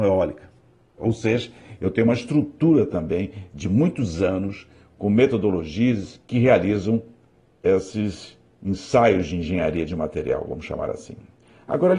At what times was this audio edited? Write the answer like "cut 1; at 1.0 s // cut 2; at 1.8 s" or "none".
cut 1; at 1.0 s // cut 2; at 6.2 s